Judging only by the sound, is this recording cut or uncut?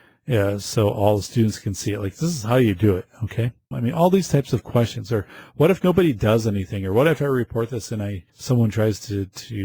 cut